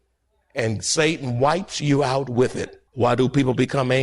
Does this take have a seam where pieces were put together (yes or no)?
yes